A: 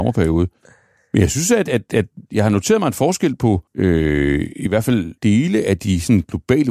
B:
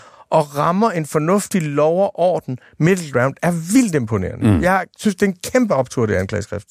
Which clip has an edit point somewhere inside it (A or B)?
A